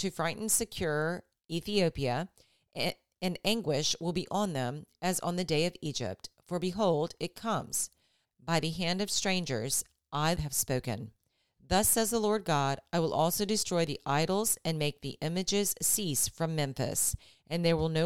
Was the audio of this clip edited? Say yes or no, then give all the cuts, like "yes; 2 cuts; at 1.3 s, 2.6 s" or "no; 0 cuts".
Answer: yes; 2 cuts; at 8.2 s, 10.4 s